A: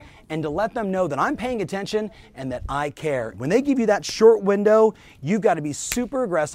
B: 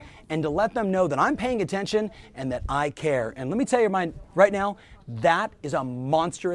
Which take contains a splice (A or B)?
A